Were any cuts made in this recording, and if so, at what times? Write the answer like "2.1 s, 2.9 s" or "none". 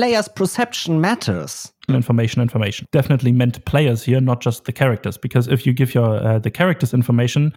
1.9 s